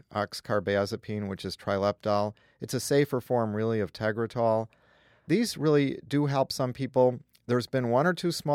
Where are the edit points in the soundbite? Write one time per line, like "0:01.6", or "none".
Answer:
none